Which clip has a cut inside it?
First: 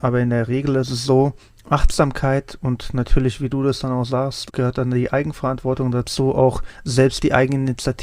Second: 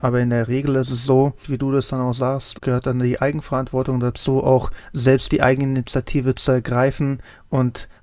second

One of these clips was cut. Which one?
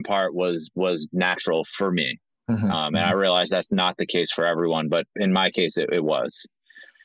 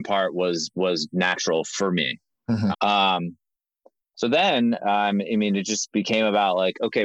second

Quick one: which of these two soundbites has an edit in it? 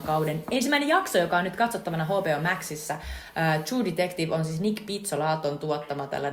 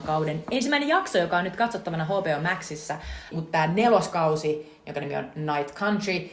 second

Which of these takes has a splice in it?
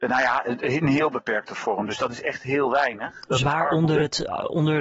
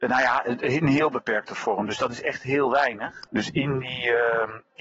second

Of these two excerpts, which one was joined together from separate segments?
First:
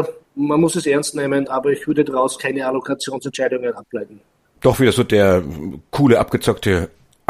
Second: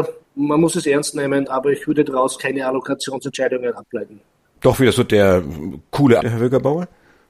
second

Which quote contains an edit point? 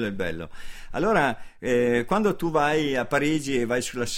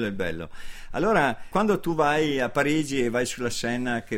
second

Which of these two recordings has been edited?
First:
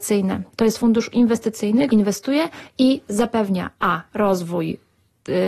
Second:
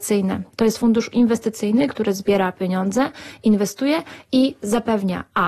first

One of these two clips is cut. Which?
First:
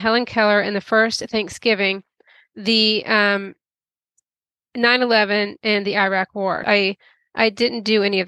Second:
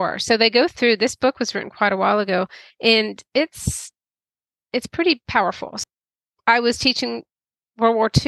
first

